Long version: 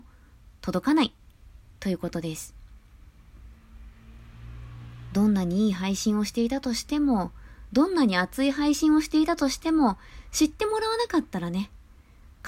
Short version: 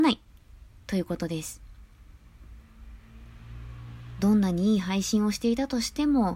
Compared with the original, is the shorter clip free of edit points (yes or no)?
yes